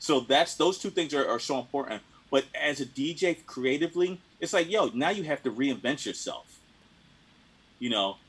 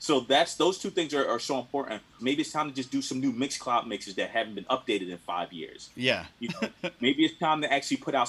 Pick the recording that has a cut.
second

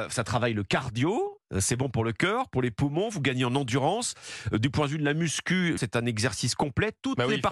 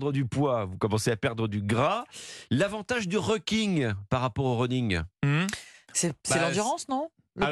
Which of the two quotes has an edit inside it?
first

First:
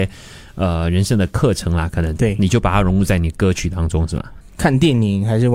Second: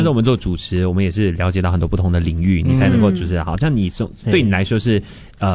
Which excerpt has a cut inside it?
first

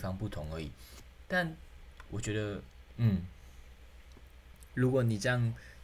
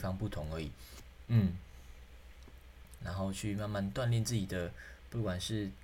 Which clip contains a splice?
second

